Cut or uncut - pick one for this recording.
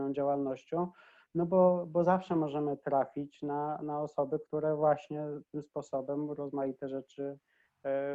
uncut